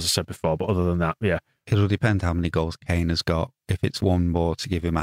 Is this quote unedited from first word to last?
yes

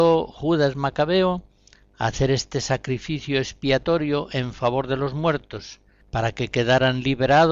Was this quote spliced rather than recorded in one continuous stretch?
no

